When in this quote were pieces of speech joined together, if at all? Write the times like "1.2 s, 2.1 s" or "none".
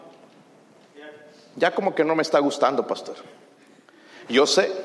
none